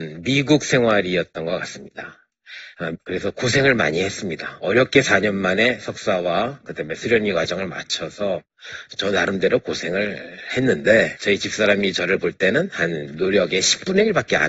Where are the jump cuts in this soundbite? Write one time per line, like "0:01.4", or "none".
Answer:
0:02.9